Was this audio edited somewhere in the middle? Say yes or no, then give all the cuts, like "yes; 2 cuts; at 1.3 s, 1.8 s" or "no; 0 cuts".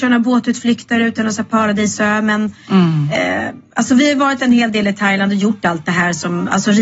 no; 0 cuts